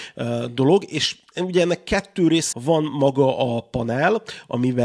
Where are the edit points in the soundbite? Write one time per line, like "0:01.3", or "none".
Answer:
0:02.5